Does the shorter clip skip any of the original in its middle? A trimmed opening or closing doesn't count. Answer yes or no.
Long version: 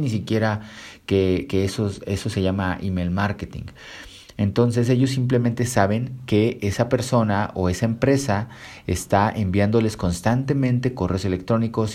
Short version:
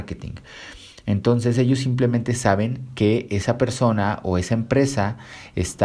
no